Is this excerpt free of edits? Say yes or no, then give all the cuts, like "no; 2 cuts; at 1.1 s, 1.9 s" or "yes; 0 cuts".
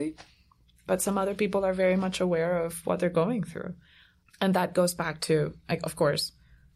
yes; 0 cuts